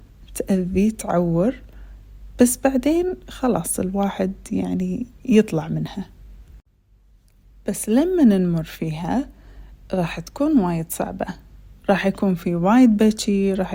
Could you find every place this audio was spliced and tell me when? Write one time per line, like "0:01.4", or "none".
none

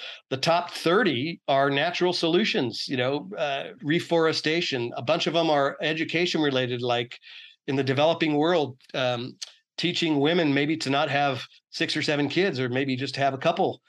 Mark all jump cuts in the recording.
0:03.8

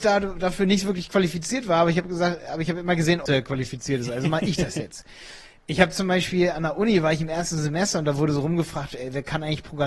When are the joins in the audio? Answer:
0:03.3

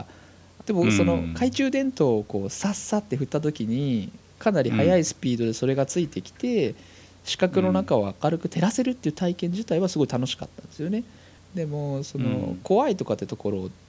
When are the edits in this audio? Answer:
0:11.4

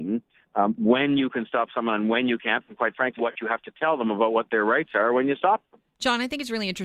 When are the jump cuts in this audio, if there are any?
0:03.2

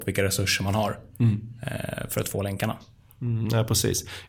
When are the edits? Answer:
none

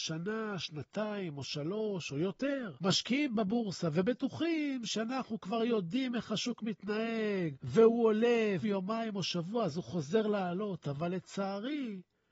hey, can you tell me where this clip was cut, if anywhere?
0:08.6

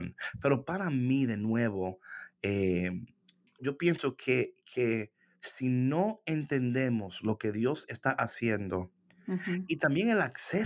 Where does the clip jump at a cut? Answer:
0:03.6

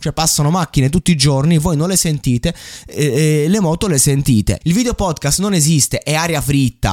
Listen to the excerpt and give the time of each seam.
0:04.6

